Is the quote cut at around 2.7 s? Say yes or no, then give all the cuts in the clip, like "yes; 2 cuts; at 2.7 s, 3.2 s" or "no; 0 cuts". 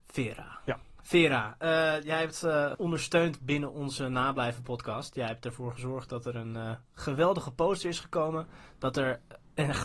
yes; 1 cut; at 2.7 s